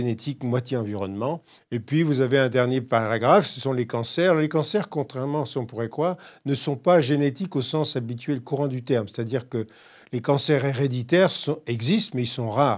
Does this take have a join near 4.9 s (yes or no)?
no